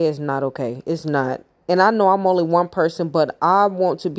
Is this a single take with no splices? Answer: yes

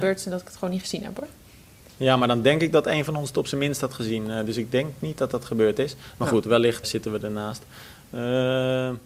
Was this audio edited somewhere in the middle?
yes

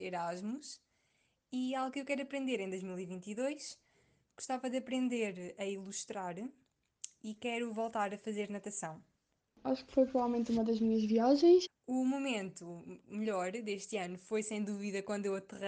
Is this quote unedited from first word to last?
no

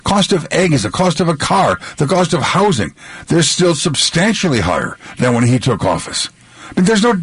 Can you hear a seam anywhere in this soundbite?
no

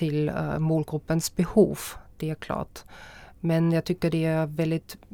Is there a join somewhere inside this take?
no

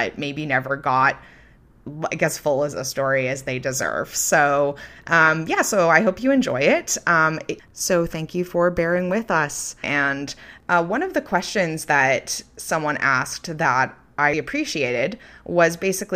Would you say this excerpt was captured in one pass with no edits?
no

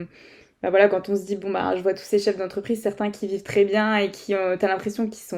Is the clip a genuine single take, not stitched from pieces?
yes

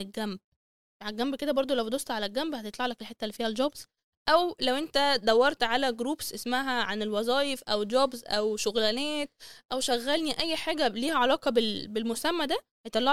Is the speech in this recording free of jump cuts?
yes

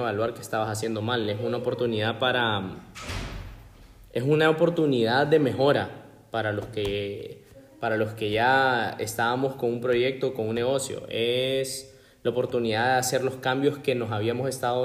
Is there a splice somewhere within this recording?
no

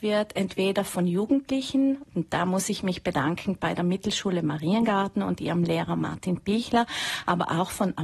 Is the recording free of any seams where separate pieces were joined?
yes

